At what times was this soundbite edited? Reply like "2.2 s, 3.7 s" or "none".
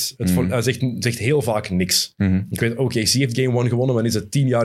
none